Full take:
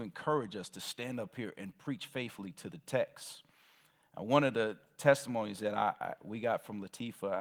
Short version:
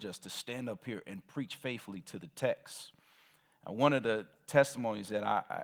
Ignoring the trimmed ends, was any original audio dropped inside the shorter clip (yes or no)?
no